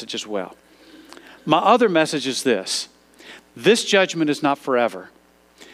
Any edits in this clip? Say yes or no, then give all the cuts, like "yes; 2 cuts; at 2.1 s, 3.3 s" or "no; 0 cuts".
no; 0 cuts